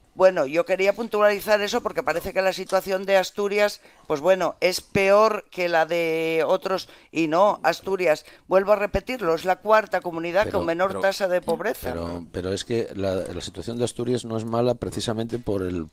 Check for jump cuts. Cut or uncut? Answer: uncut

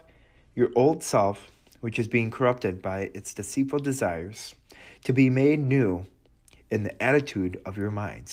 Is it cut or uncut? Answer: uncut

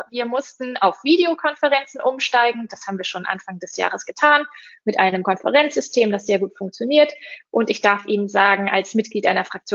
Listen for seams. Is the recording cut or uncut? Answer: uncut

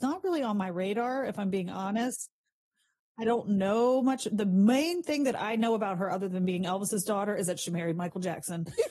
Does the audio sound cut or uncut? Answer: uncut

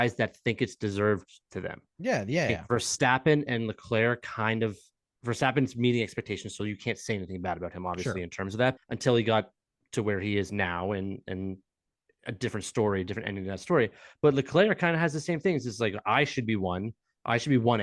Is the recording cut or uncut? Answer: cut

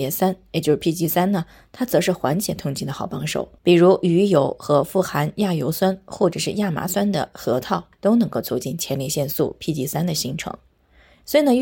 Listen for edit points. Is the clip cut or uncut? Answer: cut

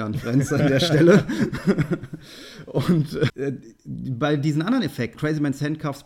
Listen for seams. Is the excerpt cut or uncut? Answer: cut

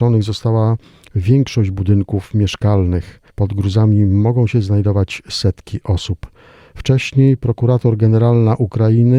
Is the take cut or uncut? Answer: cut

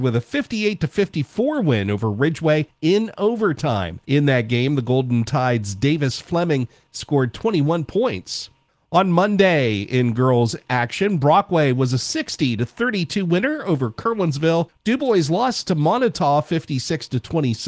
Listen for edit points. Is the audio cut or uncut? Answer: cut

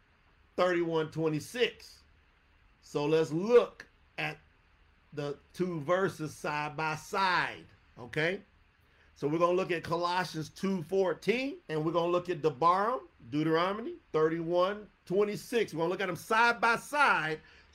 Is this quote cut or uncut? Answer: cut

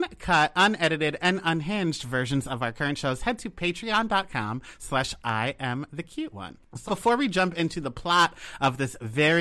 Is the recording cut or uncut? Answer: cut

